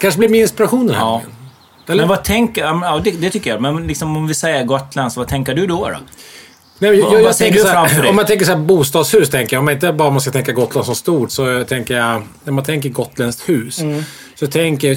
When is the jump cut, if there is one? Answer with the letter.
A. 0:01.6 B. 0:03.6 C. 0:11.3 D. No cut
C